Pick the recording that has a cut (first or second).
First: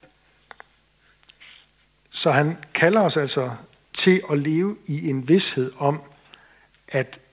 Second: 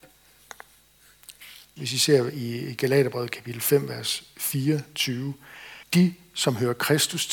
second